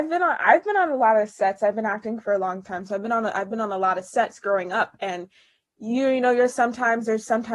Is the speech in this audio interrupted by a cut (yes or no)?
no